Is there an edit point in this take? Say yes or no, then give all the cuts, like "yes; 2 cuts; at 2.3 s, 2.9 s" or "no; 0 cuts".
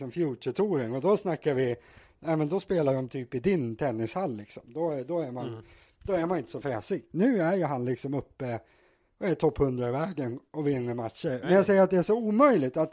yes; 1 cut; at 11.4 s